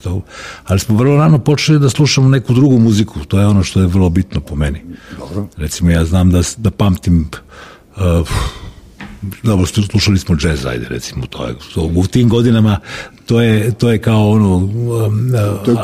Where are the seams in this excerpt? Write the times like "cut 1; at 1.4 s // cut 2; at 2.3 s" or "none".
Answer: none